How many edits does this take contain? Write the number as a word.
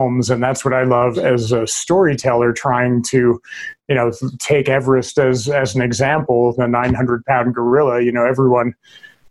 one